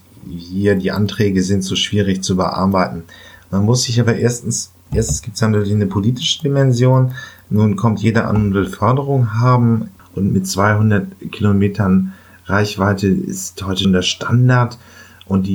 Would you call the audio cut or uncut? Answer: cut